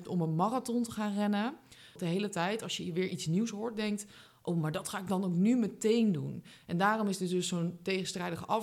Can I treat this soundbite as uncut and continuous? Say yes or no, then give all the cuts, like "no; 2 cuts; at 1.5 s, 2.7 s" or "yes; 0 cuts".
no; 1 cut; at 2.0 s